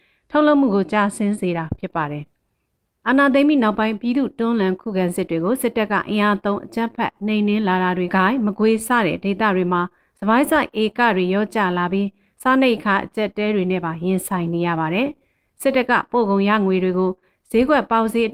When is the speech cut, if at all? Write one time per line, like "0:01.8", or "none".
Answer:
0:08.1